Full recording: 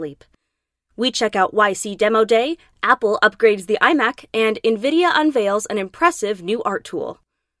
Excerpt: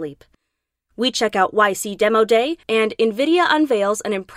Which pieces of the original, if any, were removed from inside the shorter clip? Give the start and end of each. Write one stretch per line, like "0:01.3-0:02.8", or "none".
0:02.6-0:04.3